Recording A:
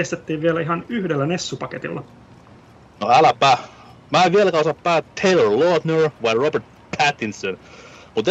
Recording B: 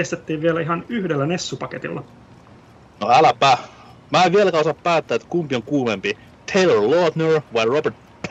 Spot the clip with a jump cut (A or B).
A